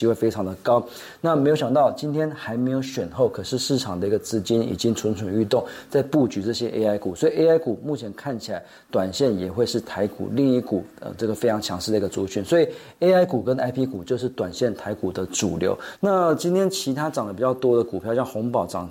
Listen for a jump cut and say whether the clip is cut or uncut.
cut